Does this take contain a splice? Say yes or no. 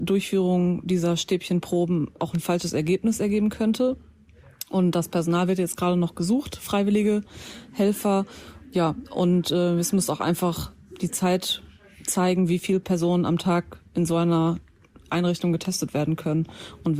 no